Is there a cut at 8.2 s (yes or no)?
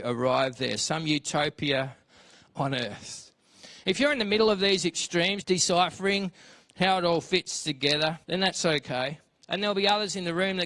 yes